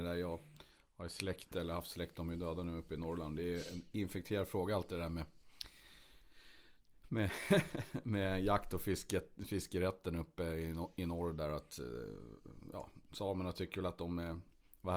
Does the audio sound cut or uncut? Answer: uncut